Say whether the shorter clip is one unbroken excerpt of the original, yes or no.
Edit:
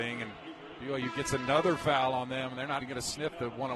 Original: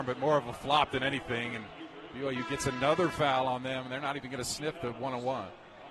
no